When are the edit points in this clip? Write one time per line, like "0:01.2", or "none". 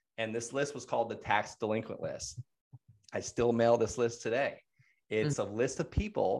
none